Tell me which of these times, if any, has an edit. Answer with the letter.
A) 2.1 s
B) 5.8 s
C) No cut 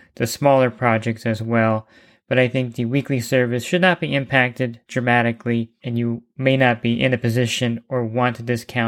B